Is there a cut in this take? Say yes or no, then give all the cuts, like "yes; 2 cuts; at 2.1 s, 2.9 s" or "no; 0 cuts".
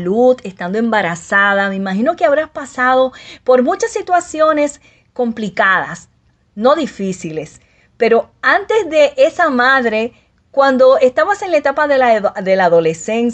no; 0 cuts